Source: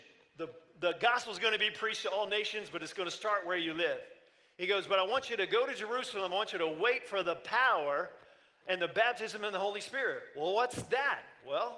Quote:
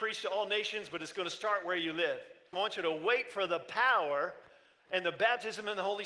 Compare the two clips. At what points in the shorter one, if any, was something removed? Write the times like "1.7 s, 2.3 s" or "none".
2.5 s